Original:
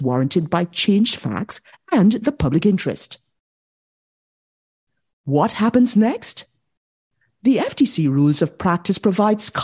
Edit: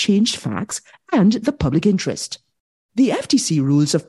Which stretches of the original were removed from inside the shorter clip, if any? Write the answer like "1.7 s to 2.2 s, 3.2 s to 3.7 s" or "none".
3.7 s to 7.4 s

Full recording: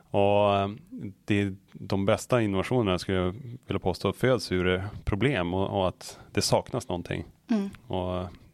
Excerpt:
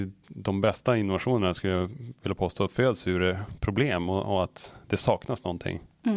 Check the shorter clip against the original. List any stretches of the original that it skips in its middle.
none

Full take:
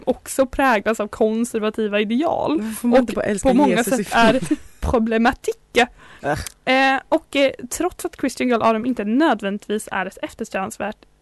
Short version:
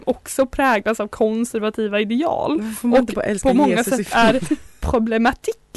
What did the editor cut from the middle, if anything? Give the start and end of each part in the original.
none

